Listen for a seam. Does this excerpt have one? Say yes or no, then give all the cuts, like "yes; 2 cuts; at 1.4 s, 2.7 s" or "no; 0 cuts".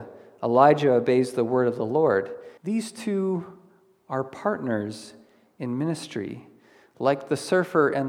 yes; 1 cut; at 2.6 s